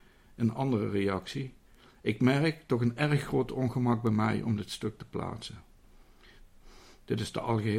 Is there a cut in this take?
no; 0 cuts

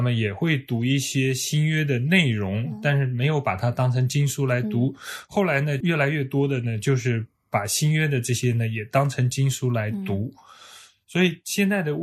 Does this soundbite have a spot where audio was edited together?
no; 0 cuts

